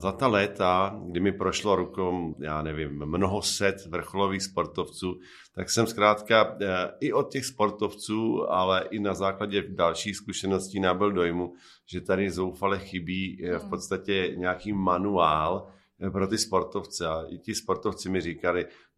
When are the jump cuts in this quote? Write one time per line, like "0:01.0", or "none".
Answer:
0:02.3